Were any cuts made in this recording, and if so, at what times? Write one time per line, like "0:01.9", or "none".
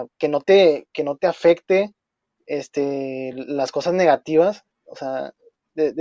none